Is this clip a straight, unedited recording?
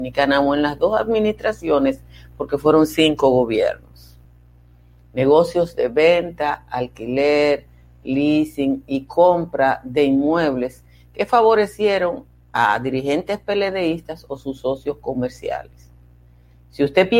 yes; 0 cuts

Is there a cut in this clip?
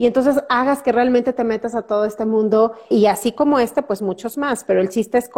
yes; 1 cut; at 2.9 s

